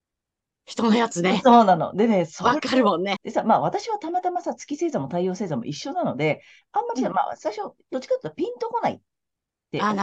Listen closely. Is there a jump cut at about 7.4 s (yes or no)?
no